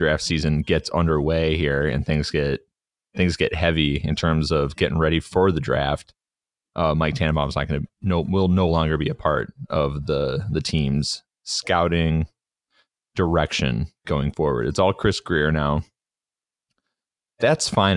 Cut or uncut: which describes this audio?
cut